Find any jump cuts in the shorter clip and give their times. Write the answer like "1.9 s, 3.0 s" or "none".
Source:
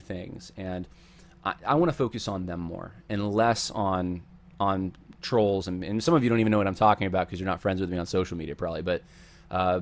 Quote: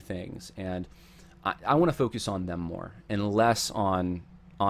none